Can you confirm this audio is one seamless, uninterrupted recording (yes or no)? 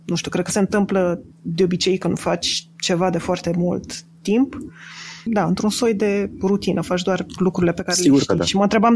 no